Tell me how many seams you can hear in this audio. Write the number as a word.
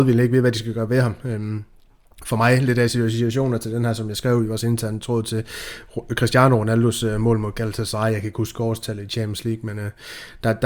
zero